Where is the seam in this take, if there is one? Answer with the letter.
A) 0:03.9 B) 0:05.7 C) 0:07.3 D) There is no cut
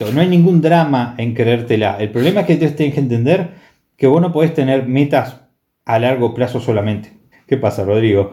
C